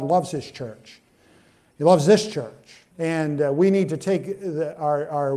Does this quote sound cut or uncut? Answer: cut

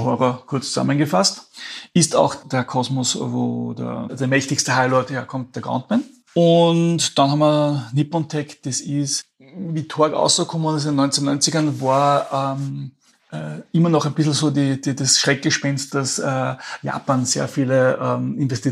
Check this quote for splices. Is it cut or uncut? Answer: uncut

